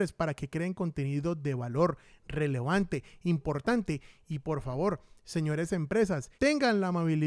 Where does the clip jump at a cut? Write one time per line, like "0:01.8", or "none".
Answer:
0:06.3